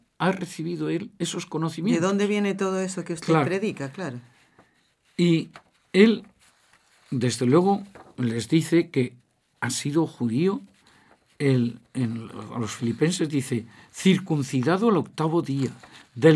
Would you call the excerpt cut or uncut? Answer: uncut